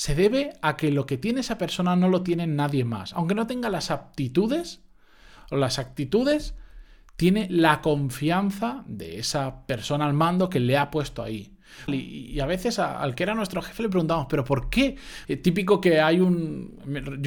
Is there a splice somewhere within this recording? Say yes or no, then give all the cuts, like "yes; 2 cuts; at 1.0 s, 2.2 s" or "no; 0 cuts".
yes; 2 cuts; at 11.9 s, 15.2 s